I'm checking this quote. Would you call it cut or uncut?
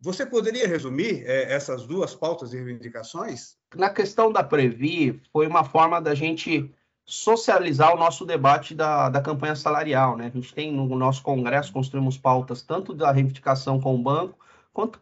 uncut